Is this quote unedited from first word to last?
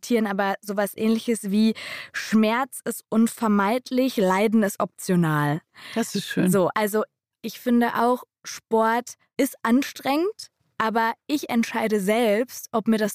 yes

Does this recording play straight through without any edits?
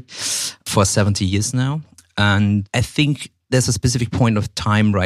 yes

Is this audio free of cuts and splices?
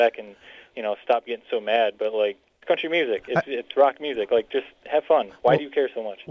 yes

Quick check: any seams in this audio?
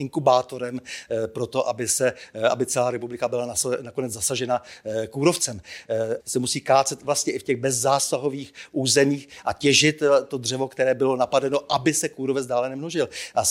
yes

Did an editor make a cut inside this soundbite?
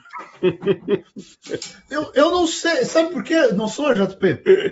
no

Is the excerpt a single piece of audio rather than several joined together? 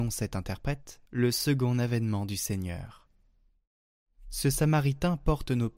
no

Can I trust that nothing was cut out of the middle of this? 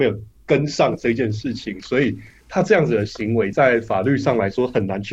yes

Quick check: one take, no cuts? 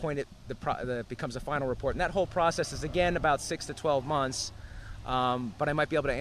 yes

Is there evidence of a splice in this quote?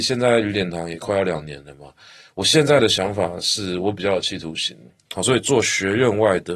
yes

